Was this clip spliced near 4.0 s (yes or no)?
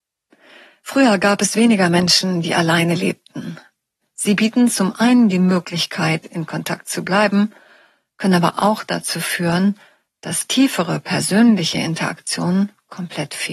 yes